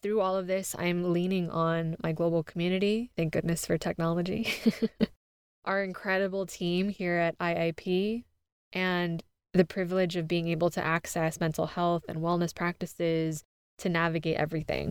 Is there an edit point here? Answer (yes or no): no